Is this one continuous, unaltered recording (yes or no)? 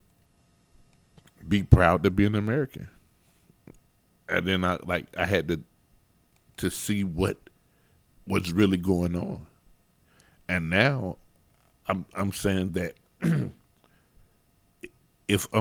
yes